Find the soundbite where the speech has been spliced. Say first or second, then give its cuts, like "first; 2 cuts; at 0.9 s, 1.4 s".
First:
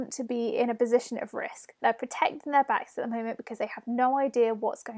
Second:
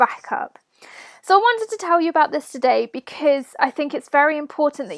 first; 1 cut; at 1.8 s